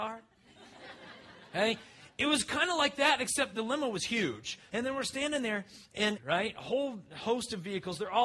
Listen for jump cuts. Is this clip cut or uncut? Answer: cut